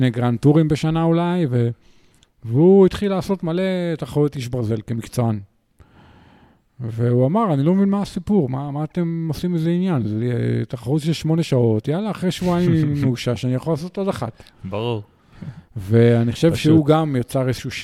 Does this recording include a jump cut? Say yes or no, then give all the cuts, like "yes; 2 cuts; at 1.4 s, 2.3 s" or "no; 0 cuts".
no; 0 cuts